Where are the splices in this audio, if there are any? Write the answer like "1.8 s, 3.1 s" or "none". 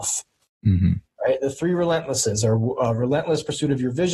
none